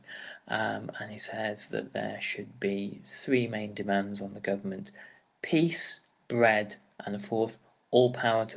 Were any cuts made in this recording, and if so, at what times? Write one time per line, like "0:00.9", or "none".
0:07.0